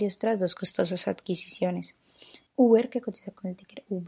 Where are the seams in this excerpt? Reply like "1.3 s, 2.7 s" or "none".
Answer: 2.5 s